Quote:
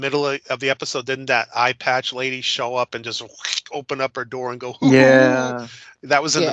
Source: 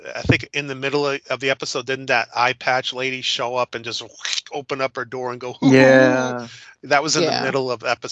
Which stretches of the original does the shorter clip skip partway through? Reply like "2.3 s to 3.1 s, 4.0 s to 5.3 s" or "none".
none

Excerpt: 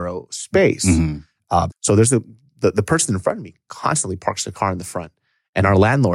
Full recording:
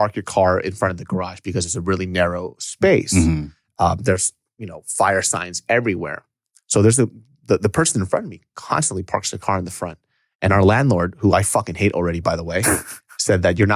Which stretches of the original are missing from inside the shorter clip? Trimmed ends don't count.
4.0 s to 6.6 s

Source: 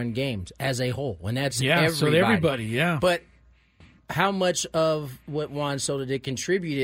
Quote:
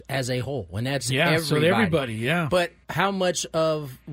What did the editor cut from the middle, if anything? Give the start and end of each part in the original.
3.3 s to 4.0 s

